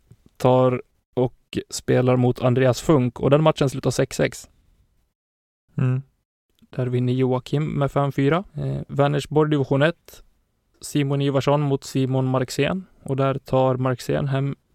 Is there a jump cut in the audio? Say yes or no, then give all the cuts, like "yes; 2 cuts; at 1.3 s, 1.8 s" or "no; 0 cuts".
yes; 2 cuts; at 6.6 s, 8.5 s